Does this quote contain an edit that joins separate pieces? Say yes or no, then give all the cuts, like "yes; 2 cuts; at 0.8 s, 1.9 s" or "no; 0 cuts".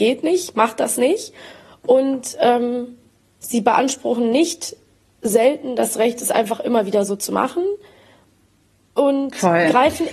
no; 0 cuts